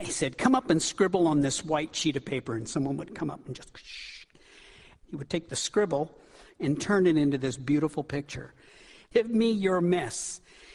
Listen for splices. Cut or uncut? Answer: cut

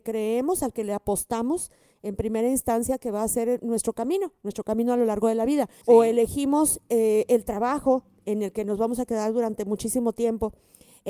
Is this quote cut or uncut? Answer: cut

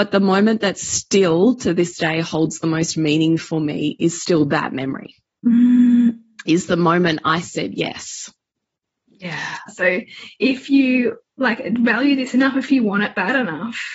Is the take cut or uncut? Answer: cut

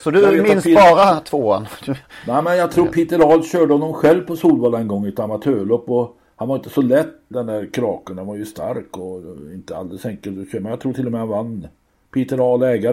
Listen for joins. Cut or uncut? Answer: cut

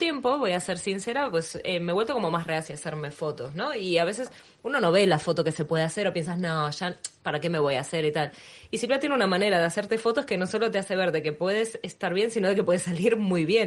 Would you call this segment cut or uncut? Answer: uncut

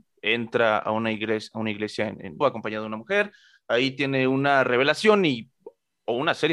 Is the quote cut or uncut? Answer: cut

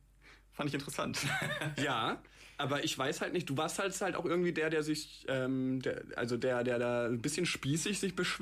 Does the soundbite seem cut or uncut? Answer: uncut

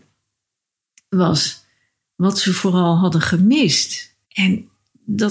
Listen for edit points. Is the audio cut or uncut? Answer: cut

